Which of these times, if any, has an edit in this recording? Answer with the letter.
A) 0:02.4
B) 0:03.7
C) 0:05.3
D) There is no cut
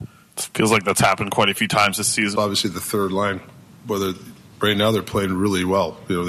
A